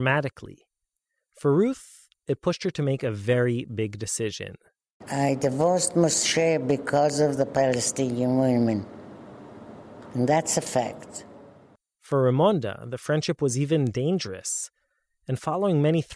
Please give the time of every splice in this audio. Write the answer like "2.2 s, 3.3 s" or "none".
none